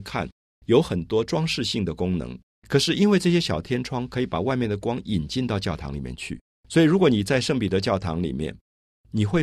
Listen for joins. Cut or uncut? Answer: cut